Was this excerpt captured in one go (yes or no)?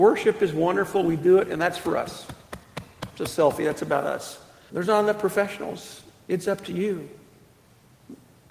no